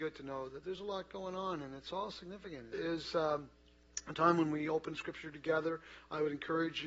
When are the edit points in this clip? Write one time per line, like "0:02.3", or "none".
0:02.7